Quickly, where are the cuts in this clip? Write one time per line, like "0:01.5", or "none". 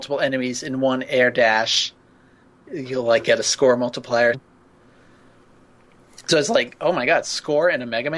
0:04.3